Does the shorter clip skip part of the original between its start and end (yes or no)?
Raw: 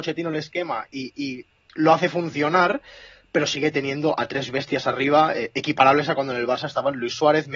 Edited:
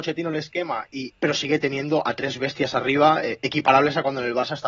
yes